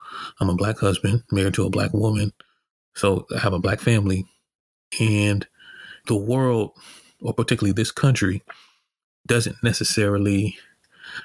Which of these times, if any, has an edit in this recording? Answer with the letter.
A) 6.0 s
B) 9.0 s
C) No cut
A